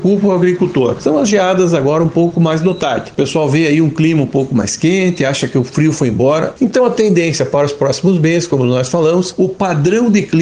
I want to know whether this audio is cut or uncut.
cut